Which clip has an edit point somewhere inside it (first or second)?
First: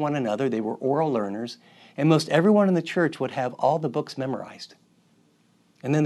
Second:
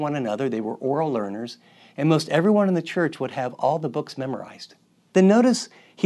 second